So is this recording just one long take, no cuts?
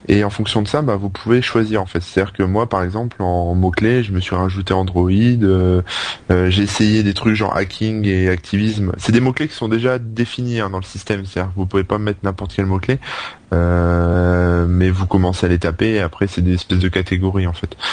yes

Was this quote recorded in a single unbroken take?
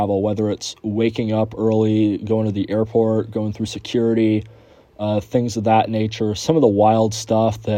yes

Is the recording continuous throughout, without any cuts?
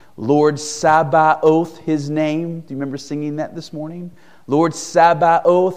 yes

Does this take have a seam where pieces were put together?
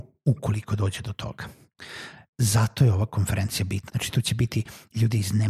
yes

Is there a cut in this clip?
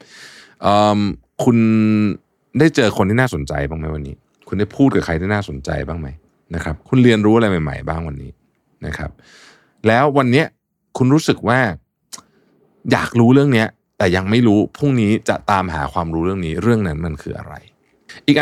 no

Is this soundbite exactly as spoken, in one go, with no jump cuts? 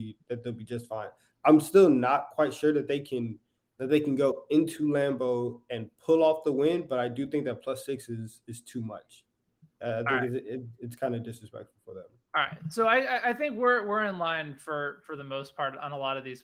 yes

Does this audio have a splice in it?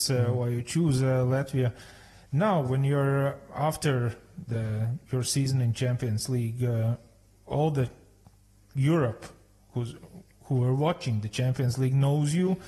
no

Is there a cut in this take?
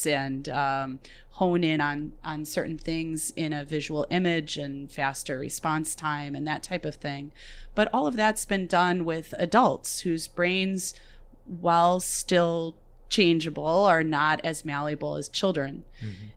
no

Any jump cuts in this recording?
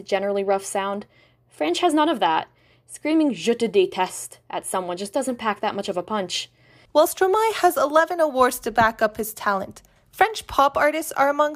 yes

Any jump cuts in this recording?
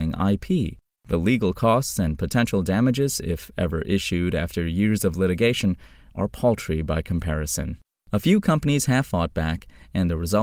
no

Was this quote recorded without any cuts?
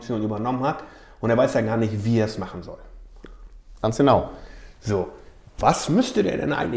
yes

